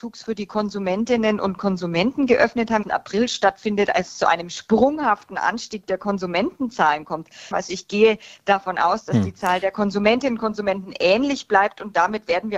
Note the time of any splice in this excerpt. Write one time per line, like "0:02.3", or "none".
0:02.8
0:07.5